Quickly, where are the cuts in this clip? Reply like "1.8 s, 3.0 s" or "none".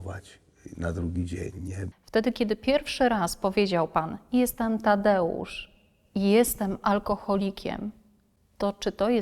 1.9 s